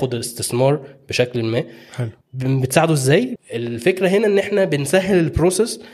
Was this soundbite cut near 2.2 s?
yes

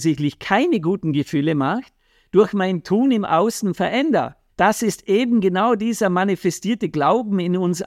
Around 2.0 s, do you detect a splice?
no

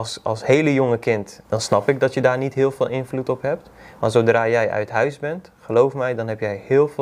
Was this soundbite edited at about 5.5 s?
no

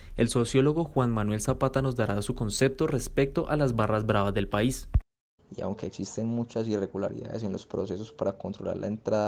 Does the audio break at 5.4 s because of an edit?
yes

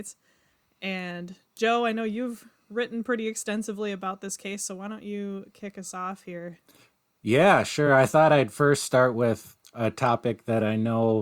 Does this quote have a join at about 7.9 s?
no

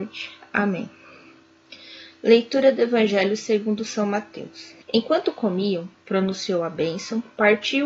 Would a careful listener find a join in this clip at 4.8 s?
yes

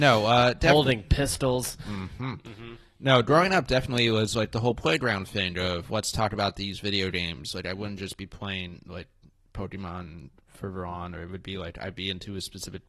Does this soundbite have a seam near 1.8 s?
no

